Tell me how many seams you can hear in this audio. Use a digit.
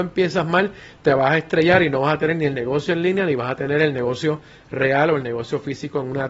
0